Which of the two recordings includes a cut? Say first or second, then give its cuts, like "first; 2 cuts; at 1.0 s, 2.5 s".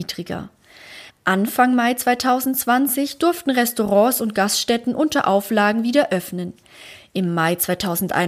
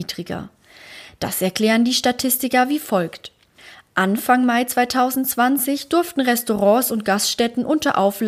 first; 1 cut; at 1.1 s